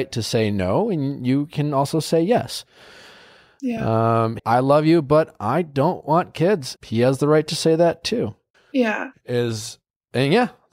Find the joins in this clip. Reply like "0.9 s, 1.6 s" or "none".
4.4 s, 6.8 s, 8.5 s